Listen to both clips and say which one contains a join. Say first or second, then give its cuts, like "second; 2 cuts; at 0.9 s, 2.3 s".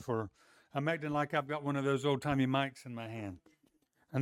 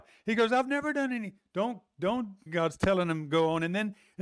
second; 1 cut; at 2.5 s